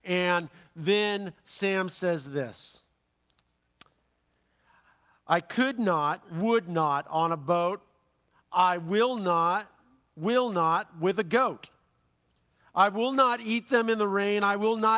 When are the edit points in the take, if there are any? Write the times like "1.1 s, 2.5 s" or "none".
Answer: none

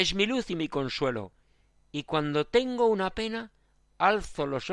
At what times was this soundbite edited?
none

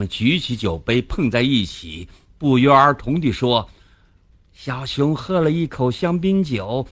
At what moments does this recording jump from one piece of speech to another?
4.3 s

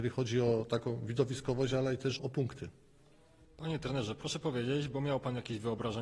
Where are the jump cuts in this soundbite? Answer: 2.2 s

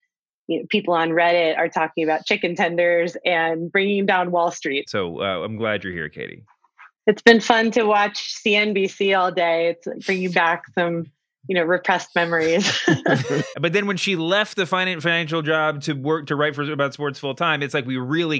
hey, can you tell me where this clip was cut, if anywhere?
4.9 s, 13.5 s

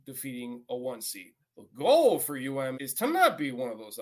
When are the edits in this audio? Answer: 1.4 s, 2.7 s

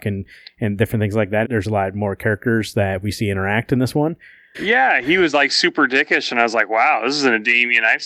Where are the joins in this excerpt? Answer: 1.4 s, 4.5 s

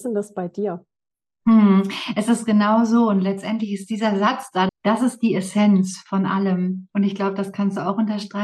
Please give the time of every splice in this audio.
4.7 s

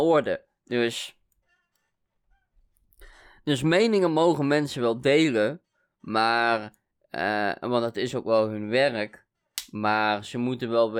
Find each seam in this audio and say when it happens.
none

